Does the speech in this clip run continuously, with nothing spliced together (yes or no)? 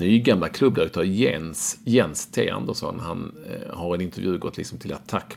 yes